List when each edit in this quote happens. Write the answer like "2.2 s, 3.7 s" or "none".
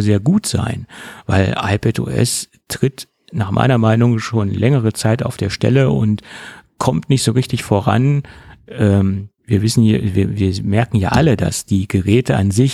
9.4 s